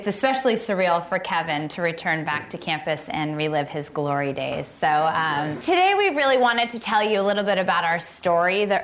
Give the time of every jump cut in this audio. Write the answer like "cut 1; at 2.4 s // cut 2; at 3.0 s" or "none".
cut 1; at 5.6 s